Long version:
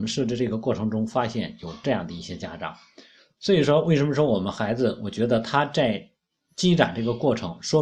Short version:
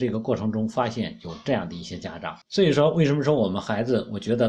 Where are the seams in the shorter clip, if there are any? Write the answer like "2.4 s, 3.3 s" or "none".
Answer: 2.4 s